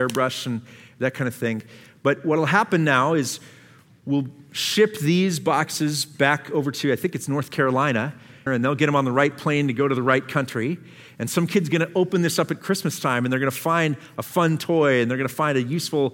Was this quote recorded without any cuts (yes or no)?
no